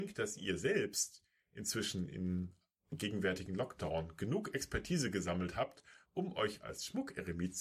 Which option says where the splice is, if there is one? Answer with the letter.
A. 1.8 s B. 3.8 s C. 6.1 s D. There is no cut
D